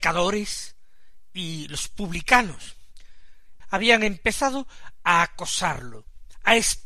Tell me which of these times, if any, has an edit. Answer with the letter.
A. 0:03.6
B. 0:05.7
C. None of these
A